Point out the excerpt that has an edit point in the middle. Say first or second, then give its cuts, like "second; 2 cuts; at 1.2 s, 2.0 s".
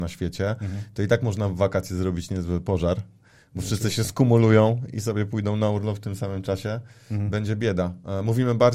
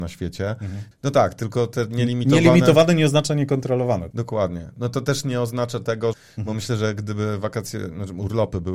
second; 3 cuts; at 0.9 s, 4.1 s, 6.1 s